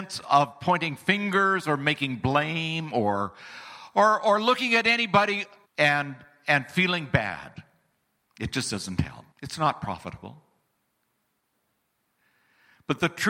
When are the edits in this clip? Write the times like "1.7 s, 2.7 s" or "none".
5.6 s, 9.3 s

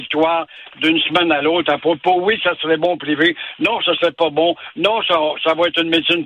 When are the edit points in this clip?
none

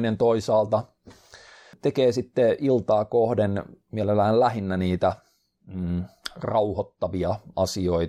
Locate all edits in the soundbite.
none

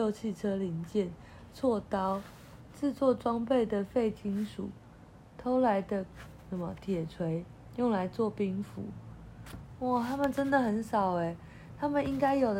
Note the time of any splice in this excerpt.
none

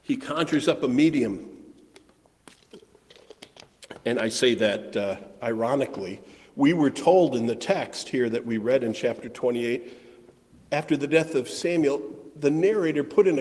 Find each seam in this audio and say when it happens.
none

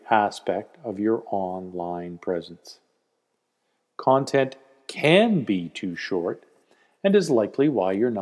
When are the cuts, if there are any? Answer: none

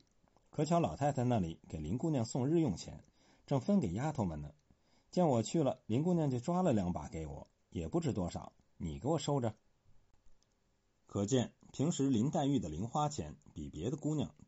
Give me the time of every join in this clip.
none

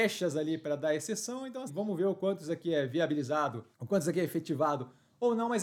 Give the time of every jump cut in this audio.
1.7 s, 3.7 s

